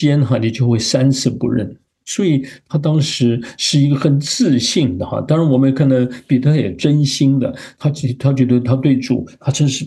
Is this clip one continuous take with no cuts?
no; 1 cut; at 1.8 s

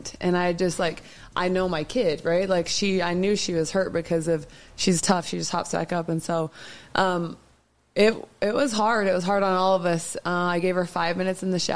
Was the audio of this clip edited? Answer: no; 0 cuts

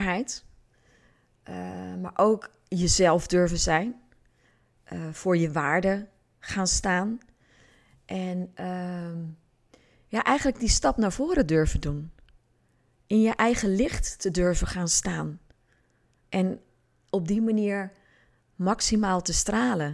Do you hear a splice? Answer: no; 0 cuts

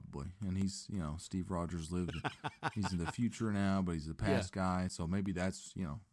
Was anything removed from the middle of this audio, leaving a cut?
no; 0 cuts

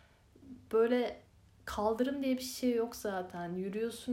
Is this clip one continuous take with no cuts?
yes; 0 cuts

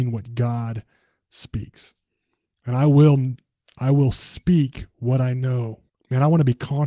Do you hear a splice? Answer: yes; 1 cut; at 5.9 s

